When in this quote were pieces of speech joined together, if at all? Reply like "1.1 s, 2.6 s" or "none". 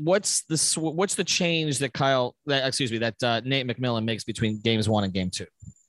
none